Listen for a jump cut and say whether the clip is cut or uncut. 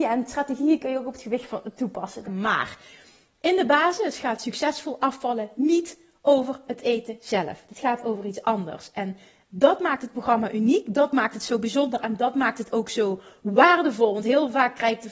cut